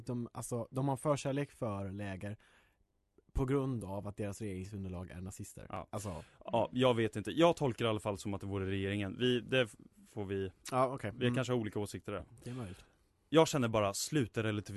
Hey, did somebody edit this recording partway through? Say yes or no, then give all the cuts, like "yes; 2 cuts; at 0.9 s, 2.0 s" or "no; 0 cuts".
no; 0 cuts